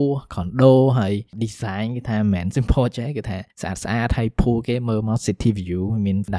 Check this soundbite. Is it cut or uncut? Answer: cut